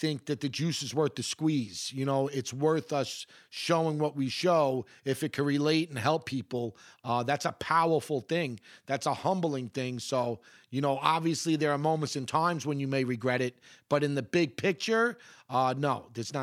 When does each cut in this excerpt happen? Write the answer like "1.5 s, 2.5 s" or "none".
none